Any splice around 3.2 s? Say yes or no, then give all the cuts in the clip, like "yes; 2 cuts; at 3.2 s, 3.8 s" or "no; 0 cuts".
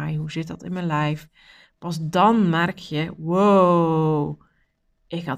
no; 0 cuts